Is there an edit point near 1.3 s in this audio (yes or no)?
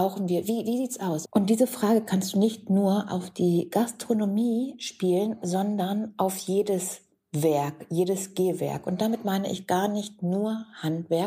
yes